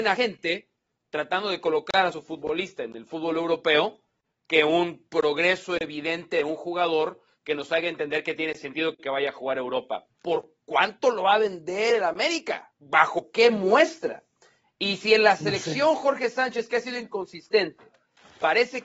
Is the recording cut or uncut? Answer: cut